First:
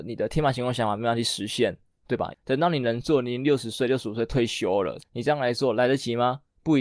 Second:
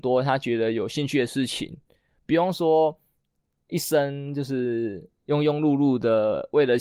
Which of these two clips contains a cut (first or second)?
first